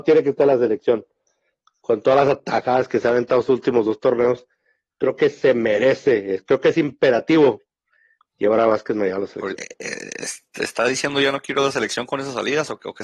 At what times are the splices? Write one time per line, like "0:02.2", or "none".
0:09.5